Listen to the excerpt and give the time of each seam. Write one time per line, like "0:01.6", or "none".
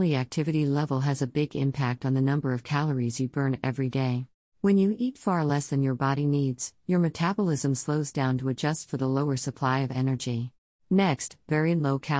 0:04.5
0:10.7